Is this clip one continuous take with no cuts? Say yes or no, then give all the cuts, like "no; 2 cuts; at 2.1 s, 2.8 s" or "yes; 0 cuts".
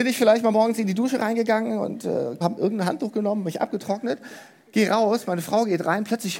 no; 1 cut; at 2.4 s